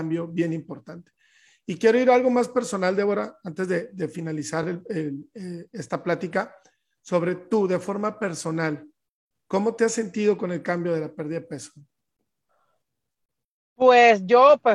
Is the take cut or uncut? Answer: uncut